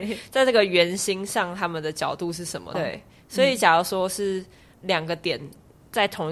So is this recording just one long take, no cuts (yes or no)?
no